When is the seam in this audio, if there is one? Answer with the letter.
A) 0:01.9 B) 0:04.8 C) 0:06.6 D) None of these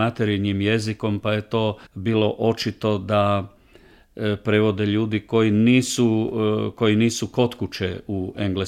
A